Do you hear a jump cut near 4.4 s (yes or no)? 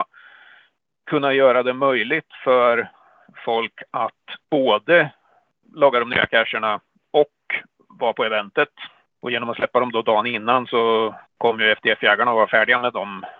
yes